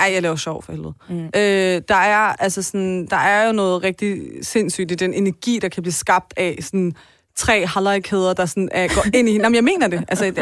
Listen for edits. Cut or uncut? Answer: uncut